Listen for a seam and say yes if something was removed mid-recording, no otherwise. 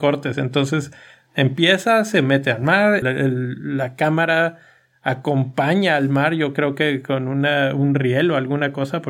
yes